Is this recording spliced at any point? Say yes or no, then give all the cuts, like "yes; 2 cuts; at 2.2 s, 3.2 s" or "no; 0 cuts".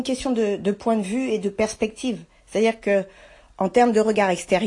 no; 0 cuts